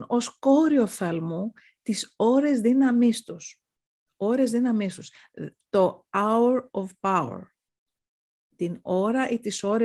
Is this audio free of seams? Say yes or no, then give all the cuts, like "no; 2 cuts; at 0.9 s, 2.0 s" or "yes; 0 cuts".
yes; 0 cuts